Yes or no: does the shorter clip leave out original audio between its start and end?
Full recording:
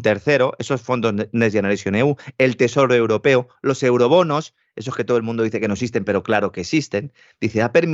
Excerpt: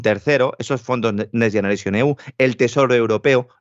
no